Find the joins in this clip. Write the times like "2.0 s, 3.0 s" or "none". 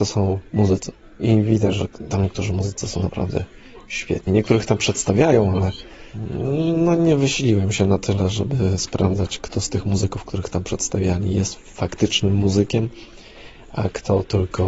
none